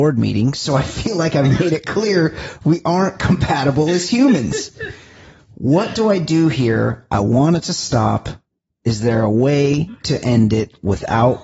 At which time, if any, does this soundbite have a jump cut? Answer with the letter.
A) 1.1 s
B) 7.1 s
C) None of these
C